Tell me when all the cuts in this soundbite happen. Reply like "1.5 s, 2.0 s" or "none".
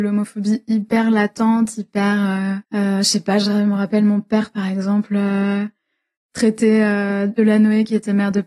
2.6 s